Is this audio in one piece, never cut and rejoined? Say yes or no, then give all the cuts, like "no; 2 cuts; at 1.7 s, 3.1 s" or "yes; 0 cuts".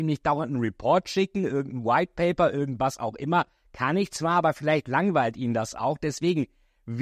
yes; 0 cuts